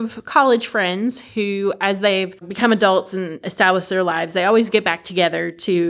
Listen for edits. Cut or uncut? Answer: cut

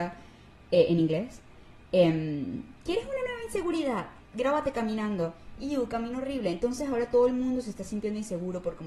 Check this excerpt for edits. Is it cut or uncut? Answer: cut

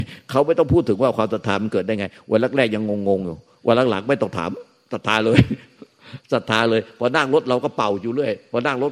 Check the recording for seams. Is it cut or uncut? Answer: uncut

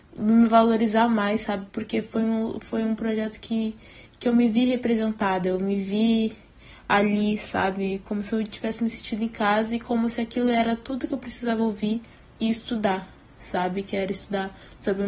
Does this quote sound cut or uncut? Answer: uncut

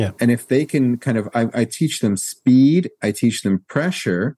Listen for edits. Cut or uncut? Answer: uncut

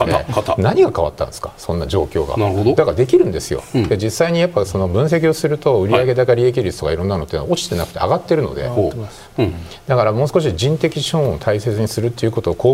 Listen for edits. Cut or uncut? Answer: cut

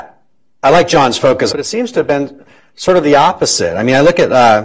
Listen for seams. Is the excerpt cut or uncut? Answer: cut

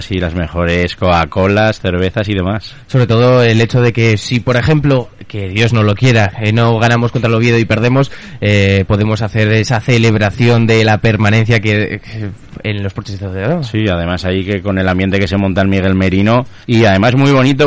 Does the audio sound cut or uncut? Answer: cut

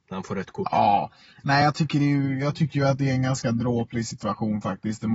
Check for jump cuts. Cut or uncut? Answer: uncut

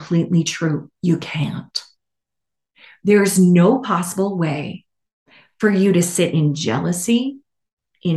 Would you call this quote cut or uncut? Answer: uncut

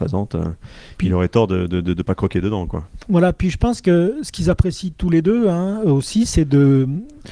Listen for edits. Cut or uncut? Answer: uncut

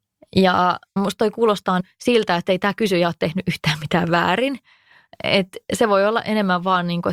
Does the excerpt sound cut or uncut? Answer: uncut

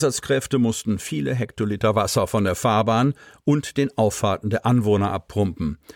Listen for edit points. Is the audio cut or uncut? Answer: uncut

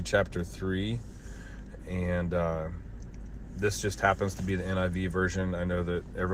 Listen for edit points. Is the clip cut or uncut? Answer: uncut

